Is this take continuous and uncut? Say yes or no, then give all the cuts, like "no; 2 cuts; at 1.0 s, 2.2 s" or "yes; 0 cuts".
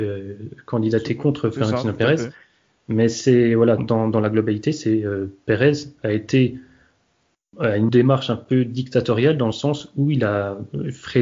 no; 2 cuts; at 3.8 s, 7.9 s